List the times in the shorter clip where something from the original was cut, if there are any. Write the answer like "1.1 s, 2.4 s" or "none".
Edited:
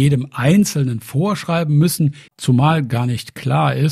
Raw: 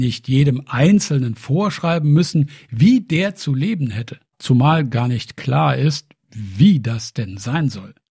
2.3 s